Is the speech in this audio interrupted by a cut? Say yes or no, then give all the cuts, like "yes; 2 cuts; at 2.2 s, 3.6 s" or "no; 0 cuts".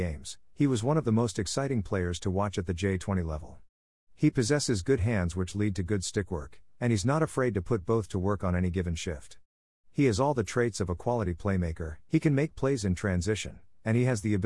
yes; 1 cut; at 12.1 s